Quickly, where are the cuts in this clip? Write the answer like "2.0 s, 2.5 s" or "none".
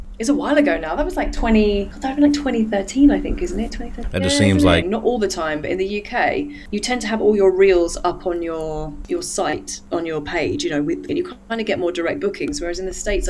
4.8 s, 11.1 s